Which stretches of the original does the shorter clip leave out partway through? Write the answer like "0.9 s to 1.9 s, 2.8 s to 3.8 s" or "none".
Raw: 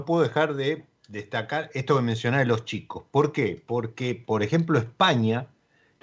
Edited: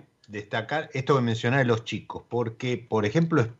3.1 s to 3.7 s